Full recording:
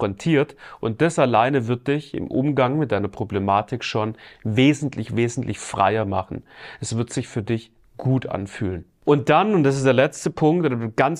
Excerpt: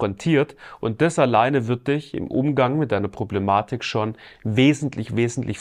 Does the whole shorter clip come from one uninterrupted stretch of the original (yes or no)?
yes